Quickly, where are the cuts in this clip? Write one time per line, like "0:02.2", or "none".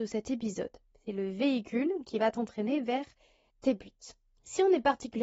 0:00.9